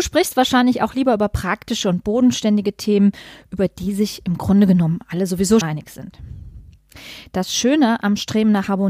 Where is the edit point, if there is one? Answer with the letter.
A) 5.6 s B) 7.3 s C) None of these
A